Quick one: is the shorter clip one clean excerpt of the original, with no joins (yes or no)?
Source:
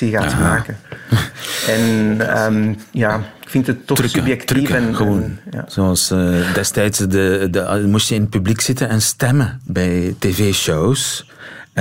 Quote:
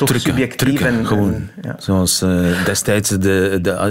yes